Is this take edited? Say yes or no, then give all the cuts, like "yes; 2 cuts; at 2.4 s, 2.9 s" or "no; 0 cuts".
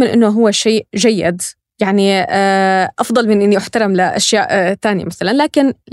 no; 0 cuts